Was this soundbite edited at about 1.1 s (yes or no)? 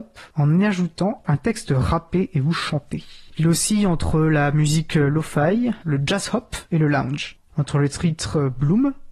no